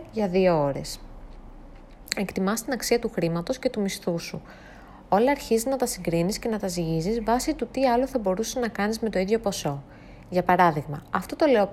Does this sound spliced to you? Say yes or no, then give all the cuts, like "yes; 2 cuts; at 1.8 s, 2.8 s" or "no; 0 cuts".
no; 0 cuts